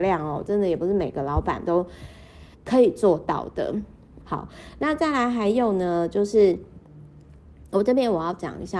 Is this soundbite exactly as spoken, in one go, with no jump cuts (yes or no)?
no